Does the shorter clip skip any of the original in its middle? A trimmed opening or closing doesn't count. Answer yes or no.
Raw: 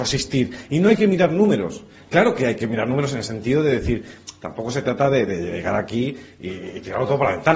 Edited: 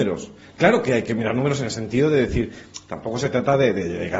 no